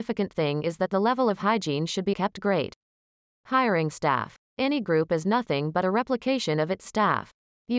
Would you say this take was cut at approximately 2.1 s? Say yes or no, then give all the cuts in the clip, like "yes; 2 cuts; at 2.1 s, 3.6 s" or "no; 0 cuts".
yes; 1 cut; at 2.1 s